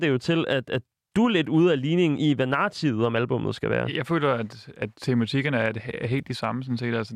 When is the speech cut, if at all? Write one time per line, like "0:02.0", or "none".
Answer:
none

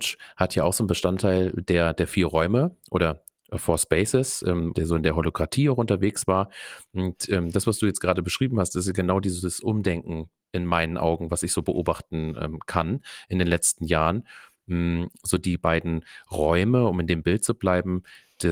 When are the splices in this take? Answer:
0:04.7

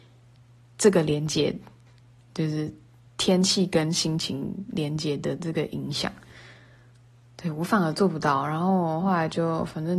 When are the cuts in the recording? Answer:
none

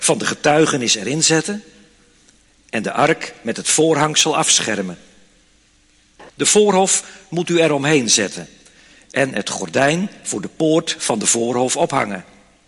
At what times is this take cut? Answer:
0:06.3

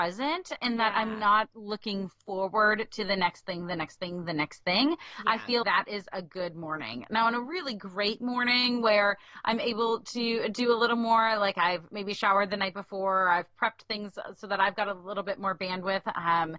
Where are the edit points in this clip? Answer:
0:05.6

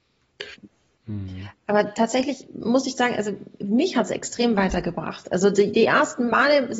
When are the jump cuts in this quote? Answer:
none

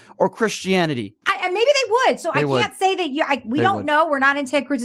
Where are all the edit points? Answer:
0:01.2

